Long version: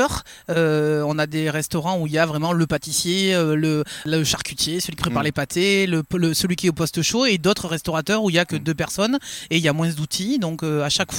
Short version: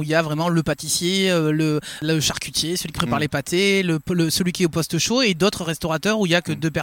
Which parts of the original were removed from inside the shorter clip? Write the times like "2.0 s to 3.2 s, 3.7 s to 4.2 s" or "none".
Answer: none

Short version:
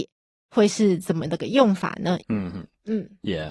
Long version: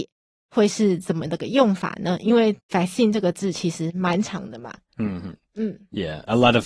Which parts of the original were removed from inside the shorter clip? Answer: 2.2 s to 4.9 s

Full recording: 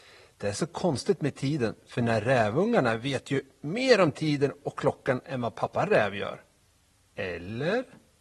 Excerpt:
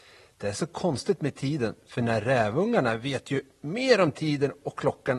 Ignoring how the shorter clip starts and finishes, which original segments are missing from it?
none

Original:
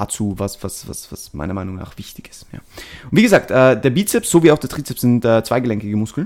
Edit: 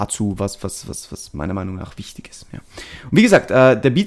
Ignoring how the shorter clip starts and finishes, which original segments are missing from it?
none

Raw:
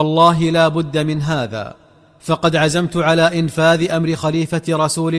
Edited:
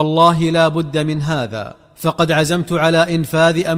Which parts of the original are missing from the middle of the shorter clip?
1.8 s to 2.1 s

